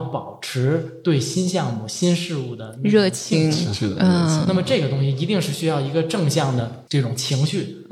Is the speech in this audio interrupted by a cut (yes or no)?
no